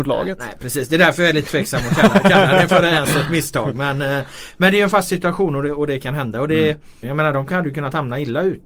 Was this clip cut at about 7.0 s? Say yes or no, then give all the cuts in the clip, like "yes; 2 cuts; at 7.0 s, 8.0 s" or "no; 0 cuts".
yes; 1 cut; at 7.0 s